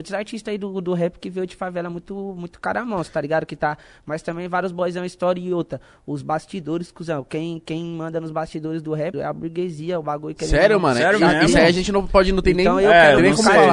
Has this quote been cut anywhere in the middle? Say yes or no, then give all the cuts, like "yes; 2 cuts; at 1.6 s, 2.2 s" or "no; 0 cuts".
yes; 1 cut; at 9.1 s